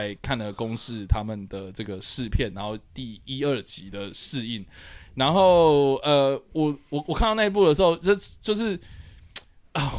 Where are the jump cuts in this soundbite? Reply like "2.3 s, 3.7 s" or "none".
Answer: none